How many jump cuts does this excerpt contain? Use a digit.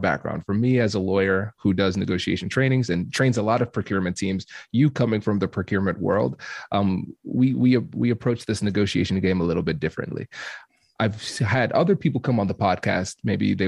0